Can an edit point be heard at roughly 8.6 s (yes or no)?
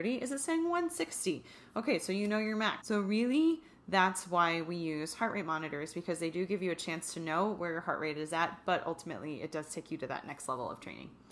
no